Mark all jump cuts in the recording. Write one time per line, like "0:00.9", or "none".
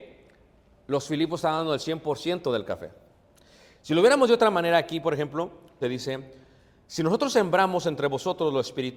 0:05.8